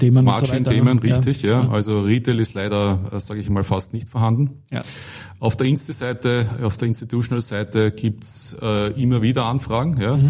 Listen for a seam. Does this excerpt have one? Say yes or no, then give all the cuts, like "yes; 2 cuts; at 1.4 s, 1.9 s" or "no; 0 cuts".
no; 0 cuts